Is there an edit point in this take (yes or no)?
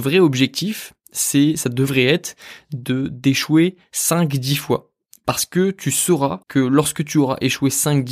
yes